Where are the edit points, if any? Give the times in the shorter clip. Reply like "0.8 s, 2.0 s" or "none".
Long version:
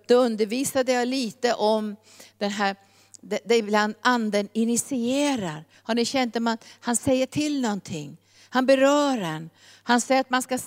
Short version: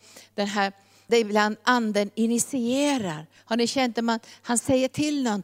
1.1 s